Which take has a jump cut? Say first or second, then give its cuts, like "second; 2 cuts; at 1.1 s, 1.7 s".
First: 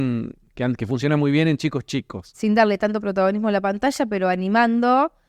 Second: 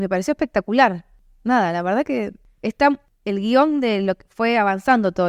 first; 1 cut; at 2.3 s